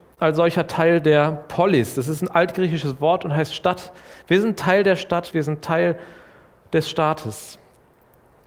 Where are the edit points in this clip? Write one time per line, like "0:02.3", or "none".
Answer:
0:05.3